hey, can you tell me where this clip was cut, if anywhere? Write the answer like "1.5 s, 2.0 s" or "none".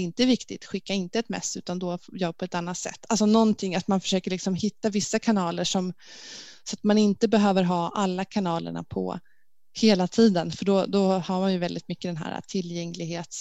none